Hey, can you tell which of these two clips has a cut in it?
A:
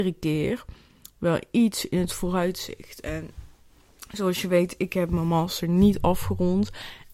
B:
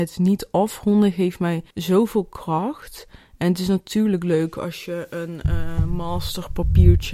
B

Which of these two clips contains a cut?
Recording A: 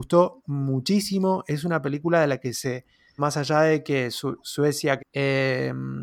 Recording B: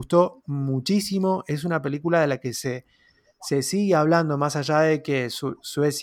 A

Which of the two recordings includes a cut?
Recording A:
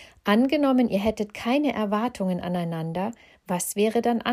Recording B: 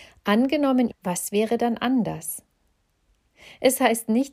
B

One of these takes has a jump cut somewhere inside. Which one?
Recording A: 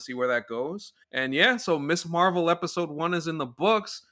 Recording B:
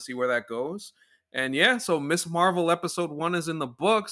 A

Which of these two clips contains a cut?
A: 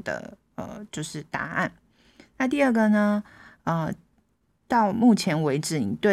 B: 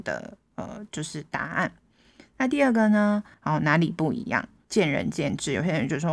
B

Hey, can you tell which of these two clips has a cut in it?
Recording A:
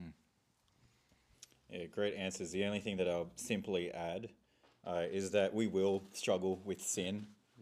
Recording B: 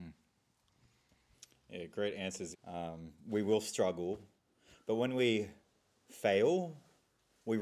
B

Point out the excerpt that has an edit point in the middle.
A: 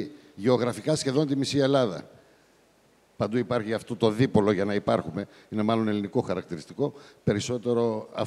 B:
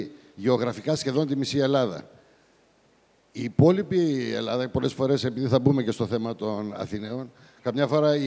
A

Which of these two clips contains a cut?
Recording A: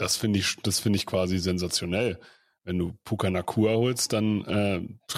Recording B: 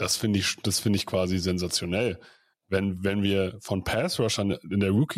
B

